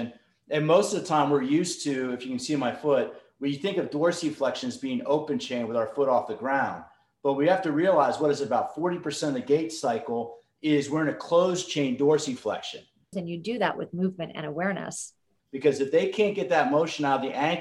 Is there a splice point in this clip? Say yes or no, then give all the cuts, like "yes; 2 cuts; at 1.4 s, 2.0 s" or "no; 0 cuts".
yes; 2 cuts; at 13.1 s, 15.4 s